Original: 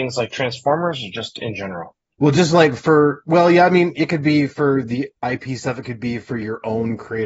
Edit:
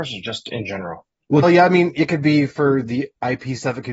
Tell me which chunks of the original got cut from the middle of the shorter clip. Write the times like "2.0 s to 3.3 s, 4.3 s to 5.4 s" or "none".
2.3 s to 3.4 s